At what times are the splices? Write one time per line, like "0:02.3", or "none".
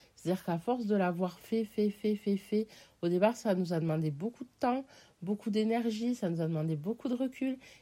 none